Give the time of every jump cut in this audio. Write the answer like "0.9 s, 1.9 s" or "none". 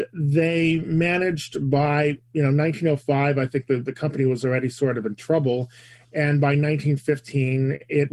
none